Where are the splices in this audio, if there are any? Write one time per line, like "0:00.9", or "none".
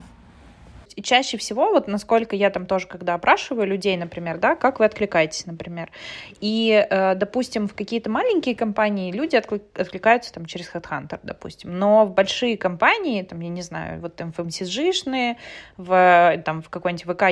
none